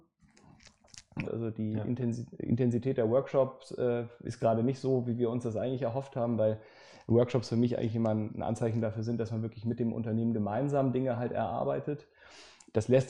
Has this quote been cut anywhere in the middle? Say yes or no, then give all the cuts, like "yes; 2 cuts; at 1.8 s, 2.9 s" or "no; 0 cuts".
yes; 1 cut; at 1.2 s